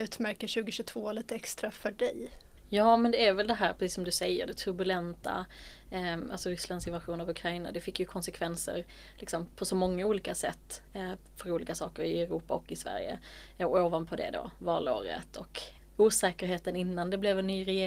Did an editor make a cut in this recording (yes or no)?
yes